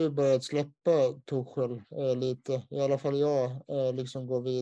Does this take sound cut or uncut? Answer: uncut